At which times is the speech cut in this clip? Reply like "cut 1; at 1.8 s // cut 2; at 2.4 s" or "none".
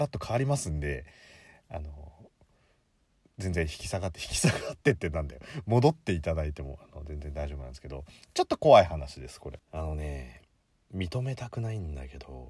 cut 1; at 9.6 s